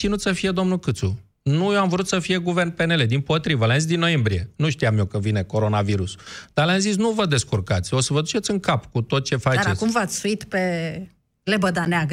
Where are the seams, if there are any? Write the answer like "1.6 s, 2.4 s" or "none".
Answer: none